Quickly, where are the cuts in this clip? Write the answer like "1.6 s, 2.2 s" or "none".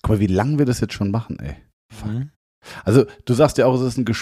none